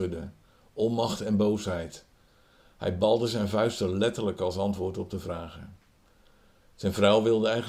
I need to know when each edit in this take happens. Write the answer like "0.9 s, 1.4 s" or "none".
none